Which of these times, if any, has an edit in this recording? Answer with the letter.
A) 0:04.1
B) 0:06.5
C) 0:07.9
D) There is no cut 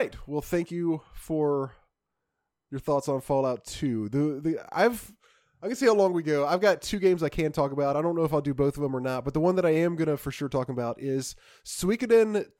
D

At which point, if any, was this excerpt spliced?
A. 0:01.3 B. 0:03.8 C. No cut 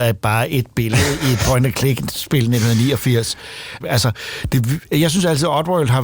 B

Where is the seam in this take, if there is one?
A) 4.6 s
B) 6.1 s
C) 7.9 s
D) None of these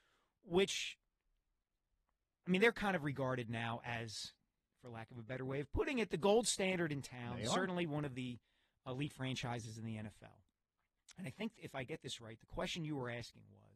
D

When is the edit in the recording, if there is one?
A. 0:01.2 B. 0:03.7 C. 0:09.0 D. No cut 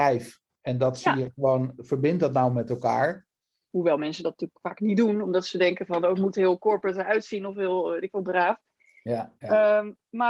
B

